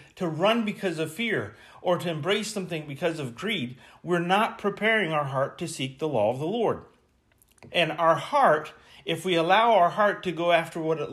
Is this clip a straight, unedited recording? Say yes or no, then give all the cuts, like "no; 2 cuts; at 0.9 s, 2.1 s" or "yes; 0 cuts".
no; 1 cut; at 7.7 s